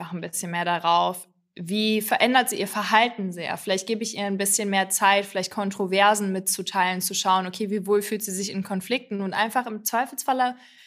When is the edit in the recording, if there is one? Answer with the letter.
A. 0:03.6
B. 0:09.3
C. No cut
C